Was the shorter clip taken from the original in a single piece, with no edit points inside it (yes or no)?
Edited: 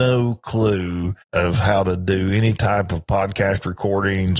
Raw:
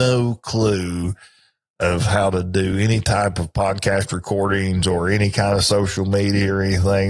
no